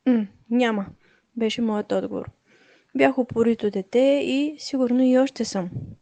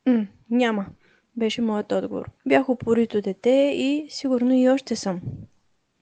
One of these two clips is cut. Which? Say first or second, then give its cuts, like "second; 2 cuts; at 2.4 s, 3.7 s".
second; 1 cut; at 2.4 s